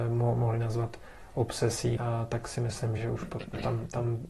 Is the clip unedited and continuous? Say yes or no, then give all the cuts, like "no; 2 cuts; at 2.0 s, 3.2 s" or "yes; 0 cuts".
no; 2 cuts; at 2.0 s, 3.0 s